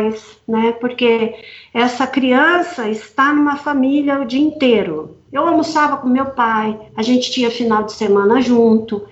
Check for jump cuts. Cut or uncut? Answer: cut